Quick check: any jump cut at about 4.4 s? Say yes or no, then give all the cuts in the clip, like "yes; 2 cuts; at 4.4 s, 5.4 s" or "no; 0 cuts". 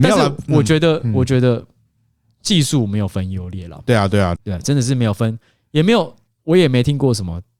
yes; 1 cut; at 4.4 s